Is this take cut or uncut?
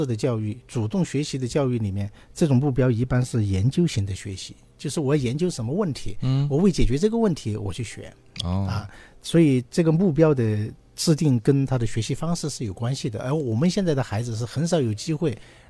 uncut